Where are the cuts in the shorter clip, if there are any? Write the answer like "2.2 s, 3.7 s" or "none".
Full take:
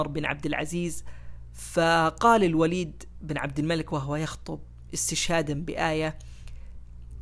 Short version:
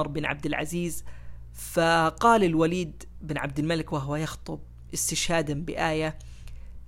none